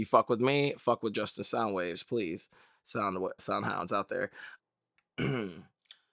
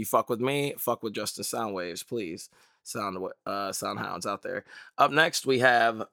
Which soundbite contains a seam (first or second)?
first